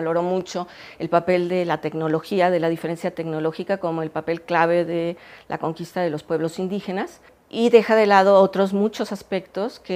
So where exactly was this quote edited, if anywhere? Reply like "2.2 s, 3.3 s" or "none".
none